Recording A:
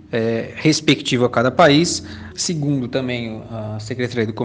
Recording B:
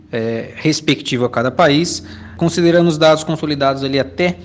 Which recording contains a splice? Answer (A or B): A